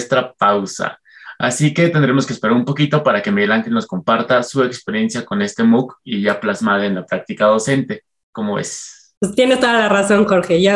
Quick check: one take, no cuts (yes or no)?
yes